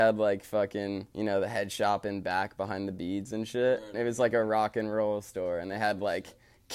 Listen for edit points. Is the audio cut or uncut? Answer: cut